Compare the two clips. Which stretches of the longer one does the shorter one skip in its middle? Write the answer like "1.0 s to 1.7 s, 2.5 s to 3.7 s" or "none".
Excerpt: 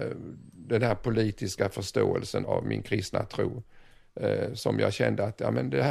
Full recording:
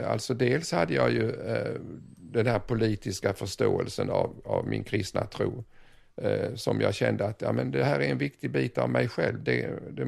4.1 s to 4.4 s